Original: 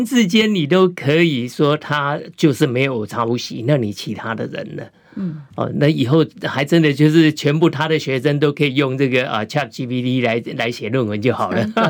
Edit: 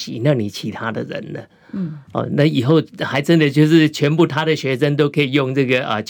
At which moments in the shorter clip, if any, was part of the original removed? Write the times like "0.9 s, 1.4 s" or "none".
none